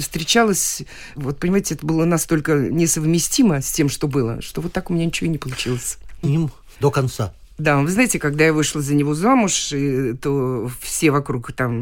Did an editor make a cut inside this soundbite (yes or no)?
yes